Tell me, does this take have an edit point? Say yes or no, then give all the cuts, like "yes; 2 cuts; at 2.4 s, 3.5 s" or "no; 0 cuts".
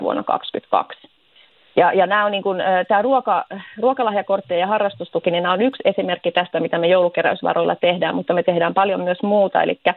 no; 0 cuts